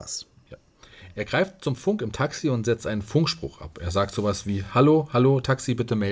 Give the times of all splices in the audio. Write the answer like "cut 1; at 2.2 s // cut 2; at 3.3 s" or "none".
none